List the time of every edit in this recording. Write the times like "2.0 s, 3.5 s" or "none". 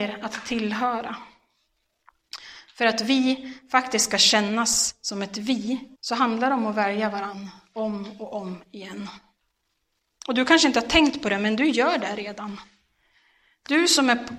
5.9 s, 10.1 s